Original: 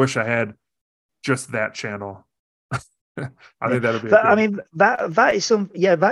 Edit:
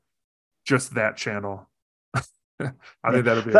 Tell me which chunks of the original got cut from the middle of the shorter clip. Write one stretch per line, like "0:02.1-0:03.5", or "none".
none